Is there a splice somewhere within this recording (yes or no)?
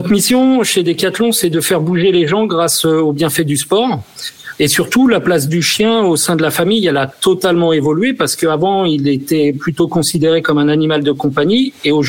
yes